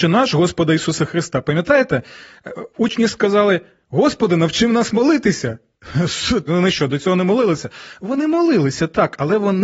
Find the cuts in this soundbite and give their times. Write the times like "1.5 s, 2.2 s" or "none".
6.5 s